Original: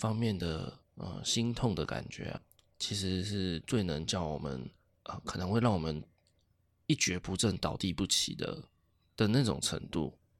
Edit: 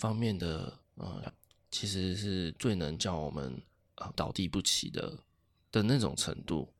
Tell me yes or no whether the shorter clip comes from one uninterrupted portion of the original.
no